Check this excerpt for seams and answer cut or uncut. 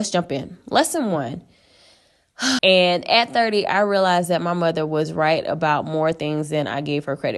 cut